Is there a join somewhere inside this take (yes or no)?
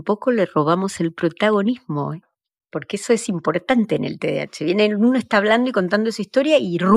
no